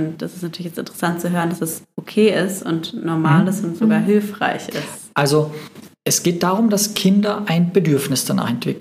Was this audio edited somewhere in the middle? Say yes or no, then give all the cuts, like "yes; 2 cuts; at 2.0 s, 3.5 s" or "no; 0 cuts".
yes; 2 cuts; at 1.9 s, 5.9 s